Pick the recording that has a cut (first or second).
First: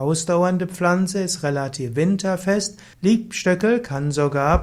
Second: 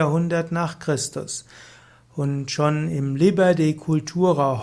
first